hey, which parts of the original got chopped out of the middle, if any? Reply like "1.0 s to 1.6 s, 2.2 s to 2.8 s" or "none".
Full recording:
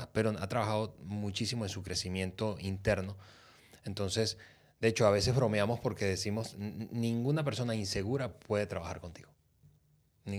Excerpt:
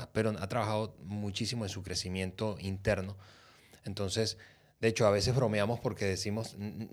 none